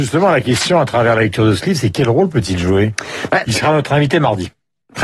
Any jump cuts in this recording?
yes; 1 cut; at 3.4 s

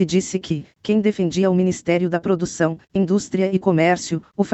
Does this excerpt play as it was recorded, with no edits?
no; 1 cut; at 2.8 s

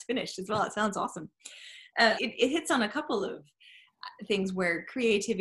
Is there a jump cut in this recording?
yes; 1 cut; at 2.2 s

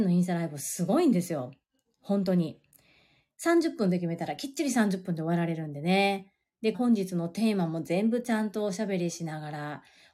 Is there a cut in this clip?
yes; 1 cut; at 6.7 s

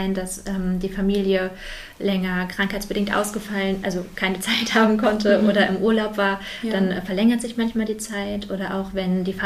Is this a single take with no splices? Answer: yes; 0 cuts

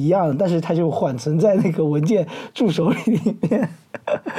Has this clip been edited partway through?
no; 0 cuts

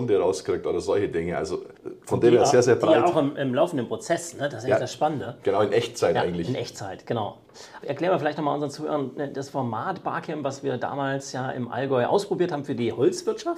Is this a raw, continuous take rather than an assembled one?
no; 1 cut; at 7.8 s

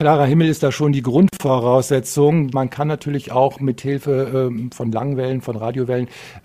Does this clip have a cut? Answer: yes; 1 cut; at 2.5 s

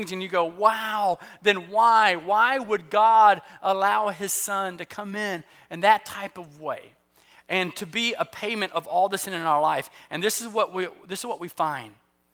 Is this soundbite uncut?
yes; 0 cuts

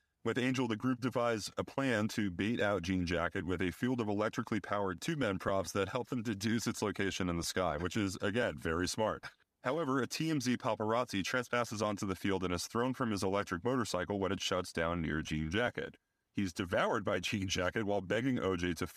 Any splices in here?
no; 0 cuts

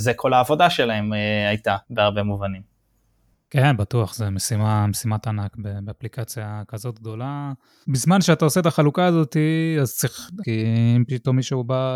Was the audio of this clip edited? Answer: yes; 3 cuts; at 1.8 s, 7.8 s, 10.4 s

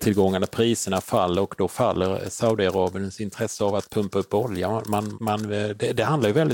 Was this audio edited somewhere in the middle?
yes; 1 cut; at 5.1 s

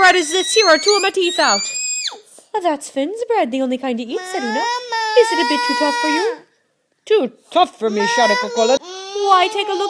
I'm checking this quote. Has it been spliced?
yes; 1 cut; at 8.8 s

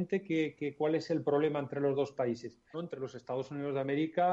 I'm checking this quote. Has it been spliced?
yes; 1 cut; at 2.7 s

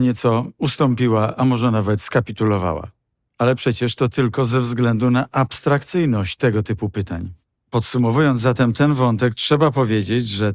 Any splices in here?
no; 0 cuts

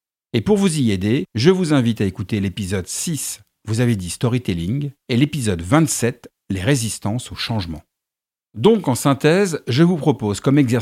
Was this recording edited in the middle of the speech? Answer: no; 0 cuts

